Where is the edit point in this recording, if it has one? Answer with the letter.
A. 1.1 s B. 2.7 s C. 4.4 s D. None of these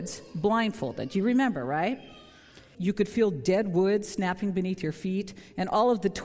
B